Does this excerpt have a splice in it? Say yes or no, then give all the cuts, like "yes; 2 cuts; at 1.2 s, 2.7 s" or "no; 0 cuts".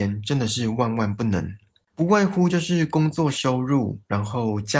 yes; 1 cut; at 1.9 s